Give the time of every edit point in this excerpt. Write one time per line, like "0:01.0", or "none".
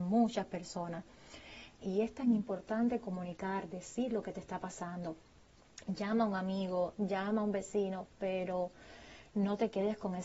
0:01.8

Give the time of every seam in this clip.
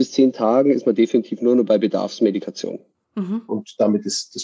0:03.5

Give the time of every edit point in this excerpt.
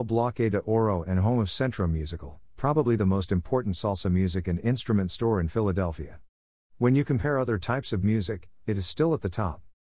0:06.6

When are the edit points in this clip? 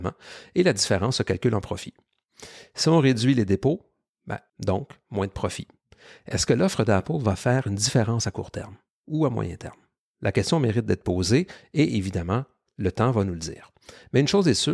0:04.5

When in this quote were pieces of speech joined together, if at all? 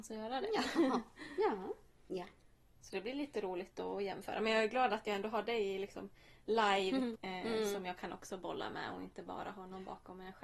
0:02.1
0:07.2

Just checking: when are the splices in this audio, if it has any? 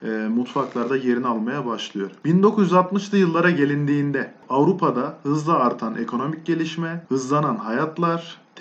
none

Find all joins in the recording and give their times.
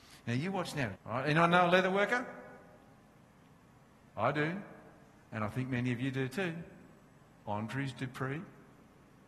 0:01.0

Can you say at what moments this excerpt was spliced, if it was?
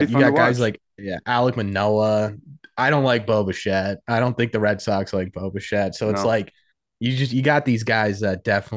none

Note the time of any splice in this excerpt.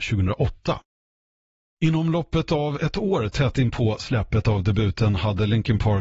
none

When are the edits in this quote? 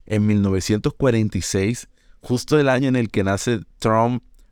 none

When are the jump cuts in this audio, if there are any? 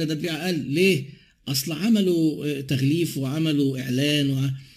none

